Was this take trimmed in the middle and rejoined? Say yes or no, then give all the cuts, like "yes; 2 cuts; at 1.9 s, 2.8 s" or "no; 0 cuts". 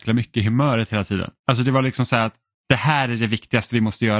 yes; 1 cut; at 1.4 s